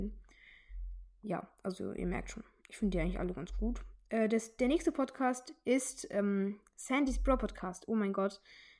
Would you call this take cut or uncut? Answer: uncut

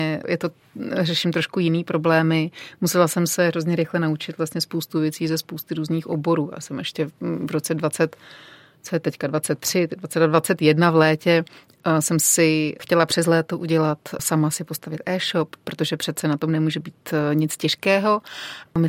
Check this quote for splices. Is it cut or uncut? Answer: uncut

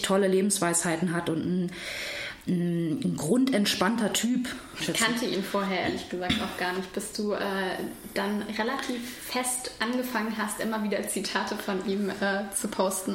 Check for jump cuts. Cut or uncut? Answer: cut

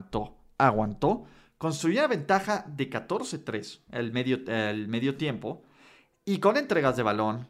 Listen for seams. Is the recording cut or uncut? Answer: uncut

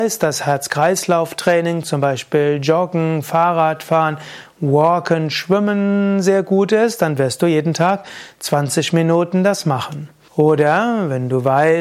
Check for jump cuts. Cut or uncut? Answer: cut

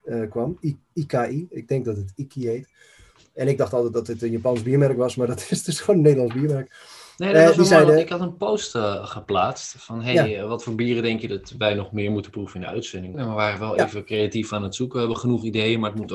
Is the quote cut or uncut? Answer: cut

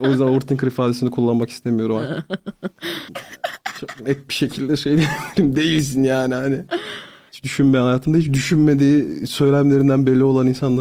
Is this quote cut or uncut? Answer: cut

